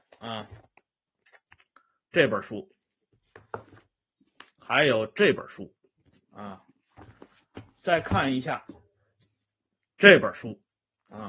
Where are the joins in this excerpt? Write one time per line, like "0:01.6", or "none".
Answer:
none